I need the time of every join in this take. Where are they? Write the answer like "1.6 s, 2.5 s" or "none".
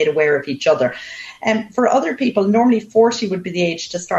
none